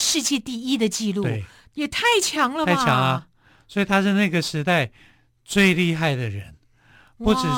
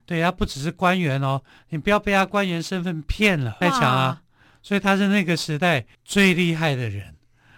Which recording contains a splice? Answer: second; 2 cuts; at 3.6 s, 5.9 s

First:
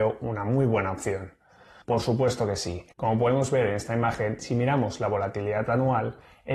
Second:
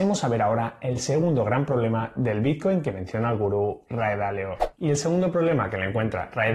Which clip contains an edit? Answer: first; 2 cuts; at 1.8 s, 2.9 s

